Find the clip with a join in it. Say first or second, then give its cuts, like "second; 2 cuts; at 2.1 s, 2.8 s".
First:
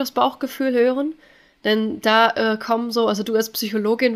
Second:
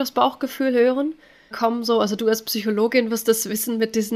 second; 1 cut; at 1.5 s